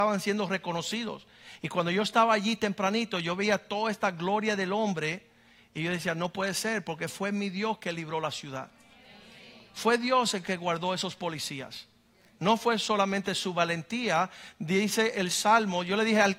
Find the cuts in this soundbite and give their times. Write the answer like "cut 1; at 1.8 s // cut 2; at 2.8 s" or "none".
none